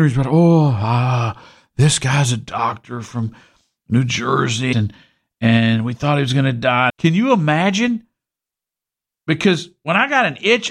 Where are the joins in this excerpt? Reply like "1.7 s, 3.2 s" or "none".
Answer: 4.7 s, 6.9 s